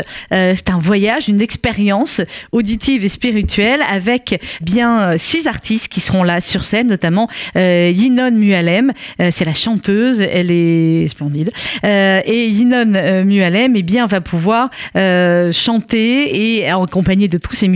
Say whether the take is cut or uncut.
cut